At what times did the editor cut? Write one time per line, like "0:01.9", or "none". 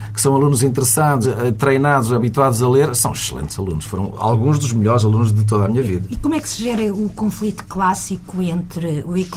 0:01.2